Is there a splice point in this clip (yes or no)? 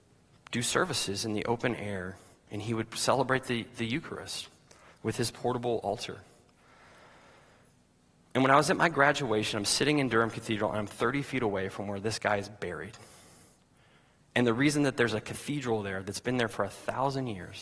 no